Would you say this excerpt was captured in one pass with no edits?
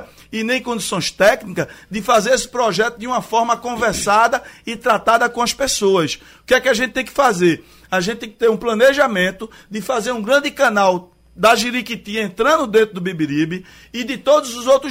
no; 1 cut; at 6.3 s

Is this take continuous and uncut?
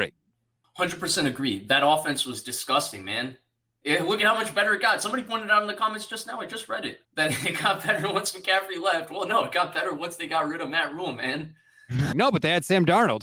no; 2 cuts; at 7.0 s, 12.1 s

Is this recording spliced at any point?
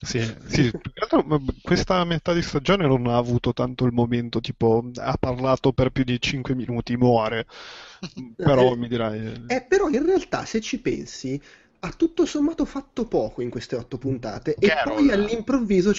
no; 0 cuts

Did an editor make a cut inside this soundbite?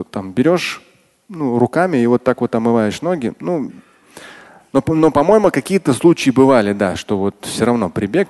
no; 0 cuts

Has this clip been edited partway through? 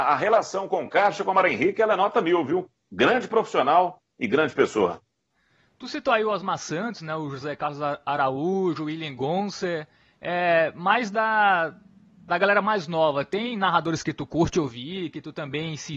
no; 0 cuts

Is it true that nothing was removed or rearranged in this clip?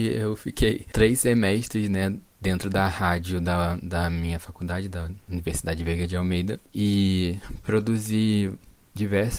yes; 0 cuts

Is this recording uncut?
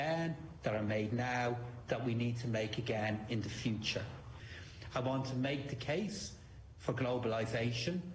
no; 1 cut; at 4.9 s

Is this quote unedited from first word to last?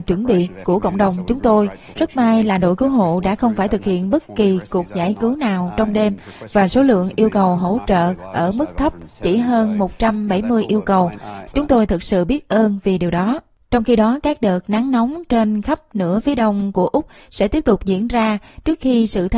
no; 2 cuts; at 1.9 s, 11.5 s

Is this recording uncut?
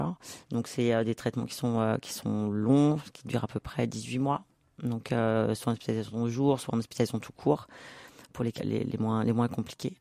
no; 1 cut; at 8.6 s

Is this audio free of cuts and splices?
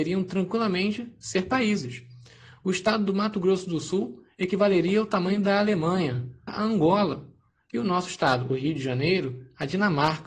no; 1 cut; at 6.5 s

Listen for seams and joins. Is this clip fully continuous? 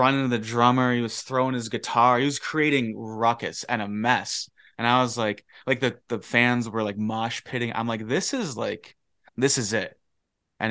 yes; 0 cuts

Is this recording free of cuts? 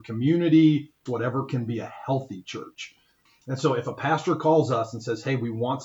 no; 2 cuts; at 1.1 s, 3.3 s

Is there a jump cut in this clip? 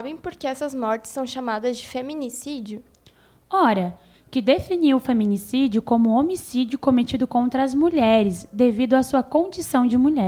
yes; 1 cut; at 4.1 s

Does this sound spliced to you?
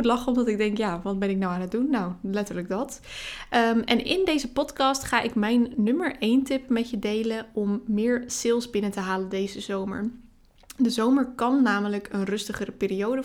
no; 0 cuts

